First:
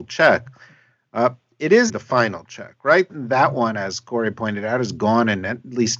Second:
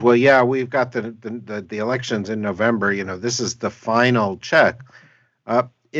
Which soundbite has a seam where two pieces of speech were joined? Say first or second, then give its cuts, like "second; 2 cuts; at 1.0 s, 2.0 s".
first; 2 cuts; at 1.9 s, 3.1 s